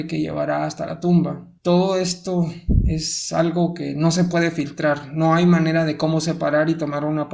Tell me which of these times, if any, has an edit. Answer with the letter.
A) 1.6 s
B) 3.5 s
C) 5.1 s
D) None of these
A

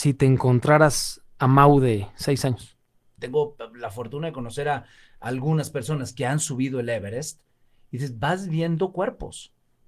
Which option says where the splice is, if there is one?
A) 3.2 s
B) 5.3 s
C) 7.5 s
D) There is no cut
A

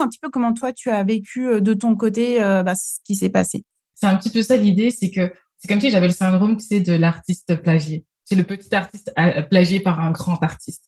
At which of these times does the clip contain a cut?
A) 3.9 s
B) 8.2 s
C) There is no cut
A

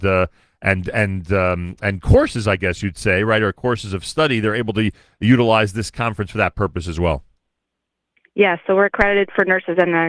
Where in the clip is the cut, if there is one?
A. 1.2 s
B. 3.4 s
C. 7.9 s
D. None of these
D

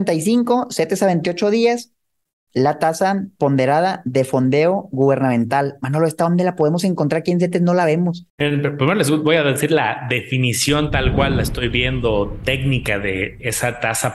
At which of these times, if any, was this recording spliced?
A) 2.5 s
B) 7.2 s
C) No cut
A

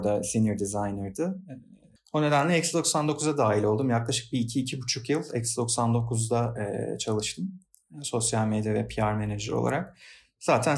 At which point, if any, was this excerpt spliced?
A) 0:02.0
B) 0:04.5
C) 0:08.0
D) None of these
A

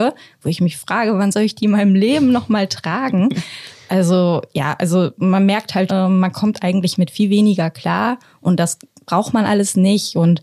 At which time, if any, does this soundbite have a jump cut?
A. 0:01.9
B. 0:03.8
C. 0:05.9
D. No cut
C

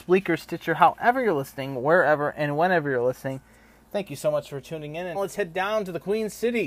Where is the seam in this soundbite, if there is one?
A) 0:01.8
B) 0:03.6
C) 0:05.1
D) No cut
C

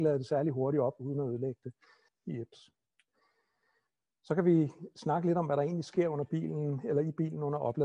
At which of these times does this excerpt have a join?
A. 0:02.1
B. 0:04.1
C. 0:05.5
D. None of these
A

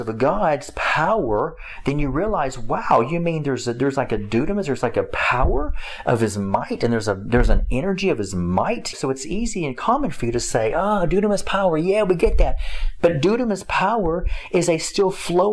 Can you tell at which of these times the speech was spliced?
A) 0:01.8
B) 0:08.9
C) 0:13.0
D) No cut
B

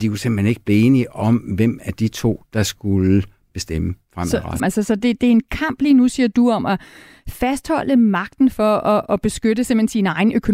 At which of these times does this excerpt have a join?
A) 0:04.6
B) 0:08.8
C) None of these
A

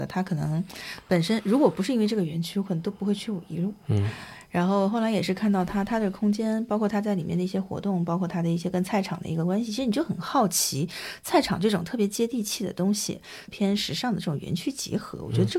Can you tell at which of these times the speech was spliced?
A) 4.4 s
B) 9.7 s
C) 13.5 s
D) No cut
C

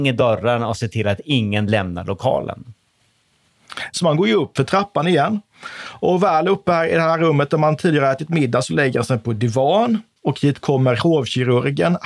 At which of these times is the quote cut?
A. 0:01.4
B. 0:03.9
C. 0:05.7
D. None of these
B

